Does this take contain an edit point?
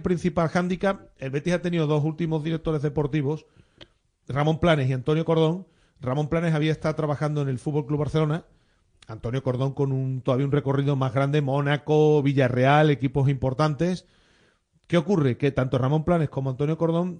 no; 0 cuts

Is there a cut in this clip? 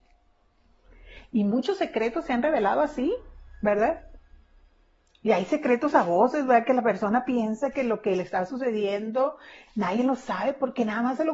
yes; 1 cut; at 9.7 s

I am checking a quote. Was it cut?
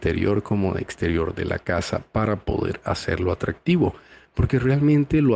no; 0 cuts

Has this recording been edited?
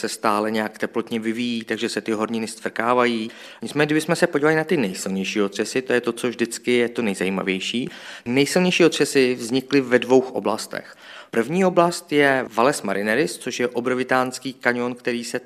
no; 0 cuts

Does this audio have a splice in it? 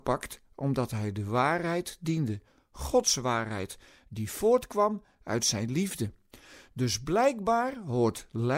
no; 0 cuts

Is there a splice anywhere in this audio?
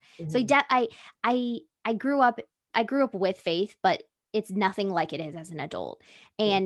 yes; 1 cut; at 2.7 s

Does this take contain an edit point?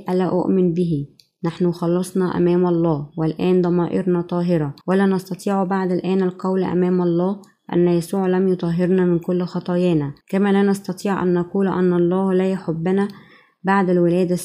yes; 2 cuts; at 4.8 s, 10.2 s

